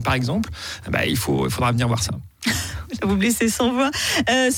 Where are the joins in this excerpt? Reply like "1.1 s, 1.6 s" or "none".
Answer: none